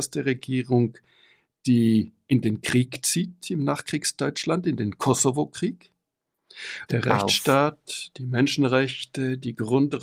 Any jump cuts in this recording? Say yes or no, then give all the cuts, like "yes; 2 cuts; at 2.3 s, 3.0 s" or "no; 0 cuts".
yes; 1 cut; at 6.9 s